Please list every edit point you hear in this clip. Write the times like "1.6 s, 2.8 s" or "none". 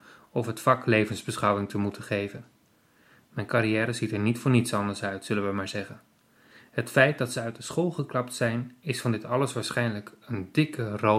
none